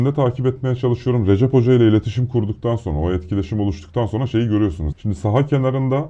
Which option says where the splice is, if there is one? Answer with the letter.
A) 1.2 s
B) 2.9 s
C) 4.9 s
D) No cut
C